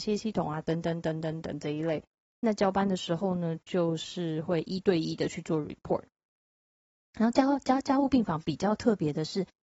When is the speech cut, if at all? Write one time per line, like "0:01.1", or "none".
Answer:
none